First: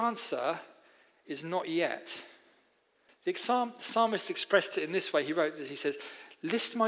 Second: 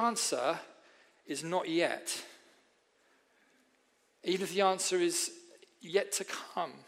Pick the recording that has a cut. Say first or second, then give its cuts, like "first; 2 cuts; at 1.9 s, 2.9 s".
first; 1 cut; at 3.1 s